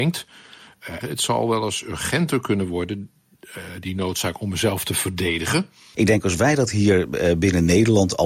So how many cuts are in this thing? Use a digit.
2